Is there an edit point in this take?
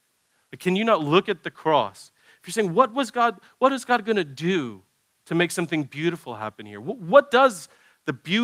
no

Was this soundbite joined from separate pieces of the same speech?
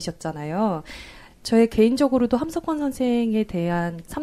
no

